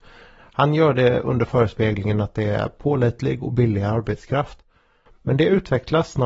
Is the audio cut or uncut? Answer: uncut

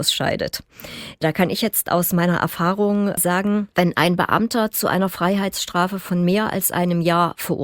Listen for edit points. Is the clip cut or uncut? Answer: uncut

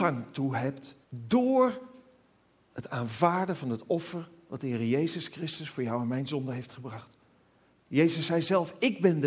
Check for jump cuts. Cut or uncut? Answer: cut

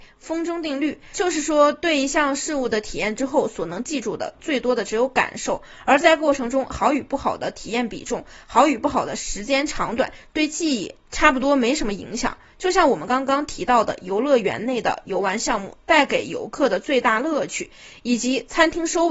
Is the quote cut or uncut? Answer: uncut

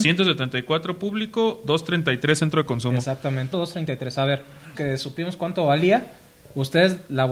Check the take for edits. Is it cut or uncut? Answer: cut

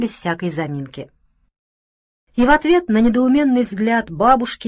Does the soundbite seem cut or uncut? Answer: cut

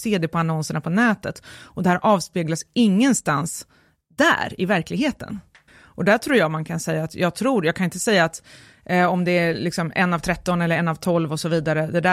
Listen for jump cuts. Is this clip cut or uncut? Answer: cut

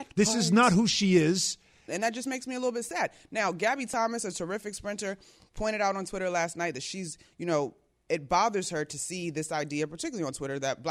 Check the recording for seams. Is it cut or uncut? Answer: cut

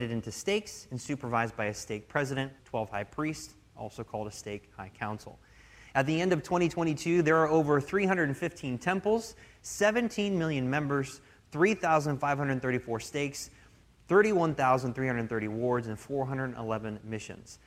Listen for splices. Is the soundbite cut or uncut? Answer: cut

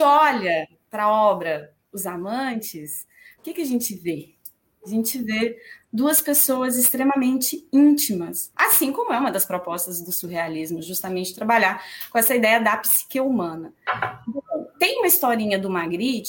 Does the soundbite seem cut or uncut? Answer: cut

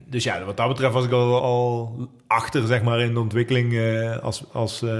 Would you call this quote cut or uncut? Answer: cut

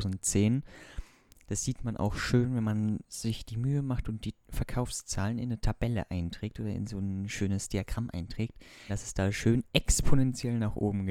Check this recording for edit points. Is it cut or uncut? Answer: cut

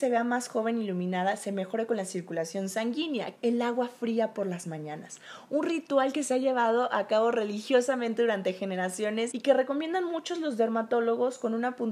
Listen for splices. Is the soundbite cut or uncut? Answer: cut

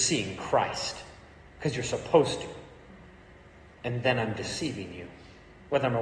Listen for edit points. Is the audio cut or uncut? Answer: uncut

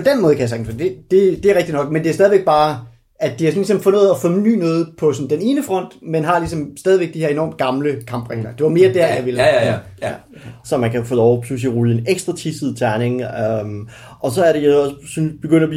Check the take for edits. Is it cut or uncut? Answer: cut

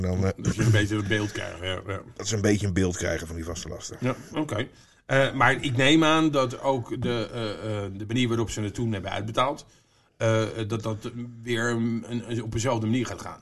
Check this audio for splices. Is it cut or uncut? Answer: uncut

